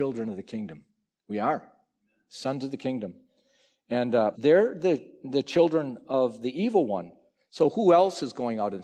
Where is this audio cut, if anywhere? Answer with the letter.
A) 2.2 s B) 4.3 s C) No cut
B